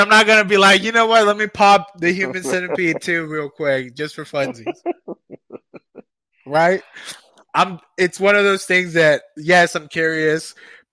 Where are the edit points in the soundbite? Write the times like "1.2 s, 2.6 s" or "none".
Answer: none